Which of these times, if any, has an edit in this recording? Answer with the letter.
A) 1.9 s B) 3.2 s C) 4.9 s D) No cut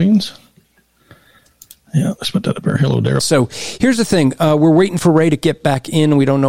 B